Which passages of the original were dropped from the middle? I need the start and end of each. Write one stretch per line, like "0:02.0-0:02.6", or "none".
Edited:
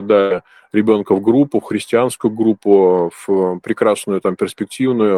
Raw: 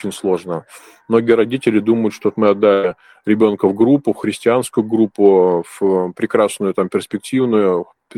none